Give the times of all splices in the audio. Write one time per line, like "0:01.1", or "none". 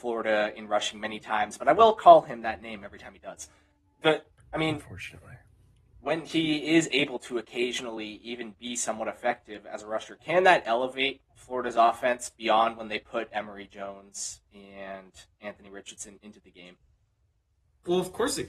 none